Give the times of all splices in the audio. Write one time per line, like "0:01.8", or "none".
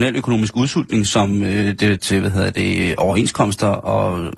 0:02.0

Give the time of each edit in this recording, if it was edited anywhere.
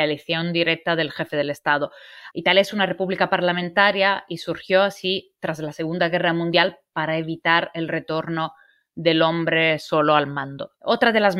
0:02.3

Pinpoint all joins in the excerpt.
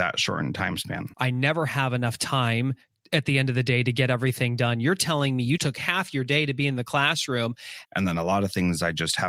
0:01.1
0:05.6
0:07.8

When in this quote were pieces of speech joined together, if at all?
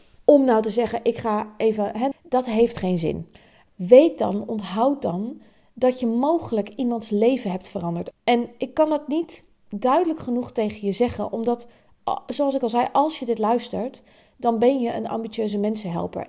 0:02.1
0:03.7
0:08.1

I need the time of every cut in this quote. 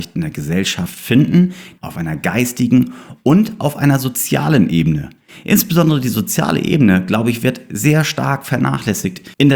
0:01.8

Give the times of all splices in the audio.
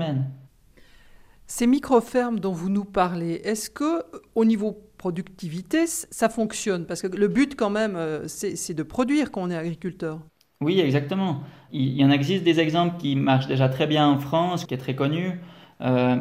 0:14.7

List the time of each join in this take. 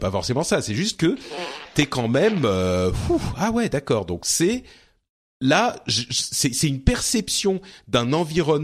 none

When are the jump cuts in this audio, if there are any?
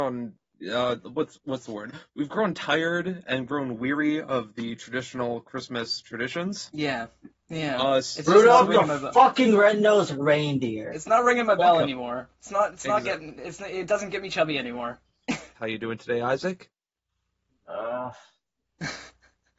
0:15.5

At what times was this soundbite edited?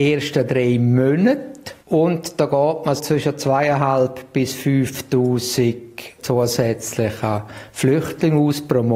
0:01.8
0:03.0

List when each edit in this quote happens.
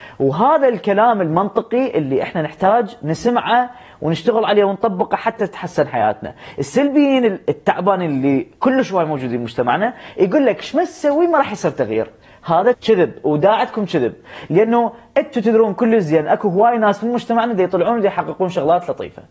0:12.7

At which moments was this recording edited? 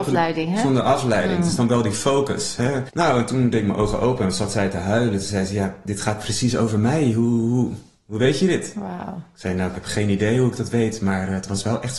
0:02.9

